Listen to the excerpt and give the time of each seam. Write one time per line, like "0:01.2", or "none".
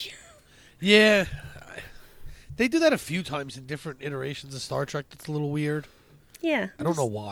none